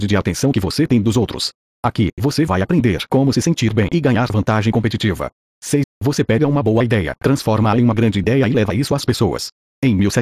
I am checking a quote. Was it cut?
yes; 1 cut; at 5.8 s

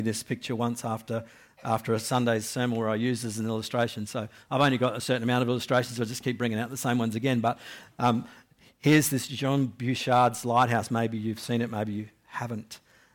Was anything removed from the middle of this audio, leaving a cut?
no; 0 cuts

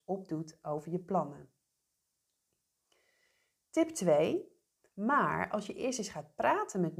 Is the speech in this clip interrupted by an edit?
yes; 1 cut; at 4.9 s

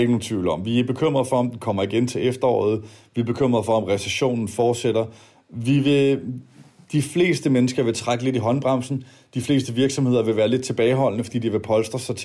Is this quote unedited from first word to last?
yes; 0 cuts

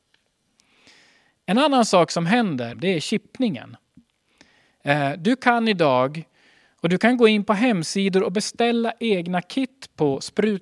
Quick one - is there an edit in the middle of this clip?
yes; 1 cut; at 2.7 s

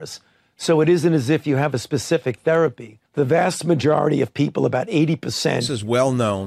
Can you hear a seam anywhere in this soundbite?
yes; 1 cut; at 3.1 s

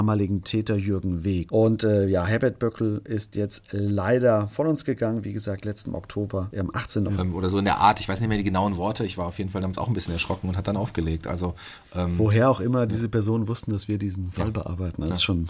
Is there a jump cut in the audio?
yes; 2 cuts; at 1.5 s, 7.1 s

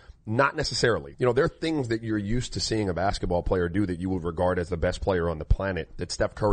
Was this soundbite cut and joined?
yes; 1 cut; at 1.1 s

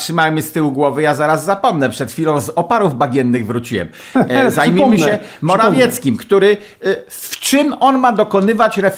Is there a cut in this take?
no; 0 cuts

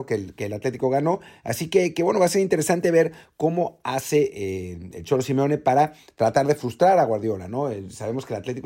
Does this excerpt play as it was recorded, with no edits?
yes; 0 cuts

